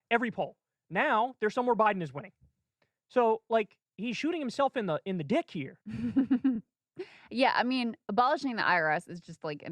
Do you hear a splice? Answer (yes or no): no